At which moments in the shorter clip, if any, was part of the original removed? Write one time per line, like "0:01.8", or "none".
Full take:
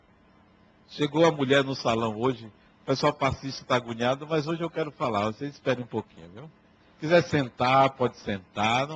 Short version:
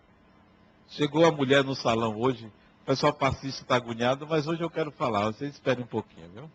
none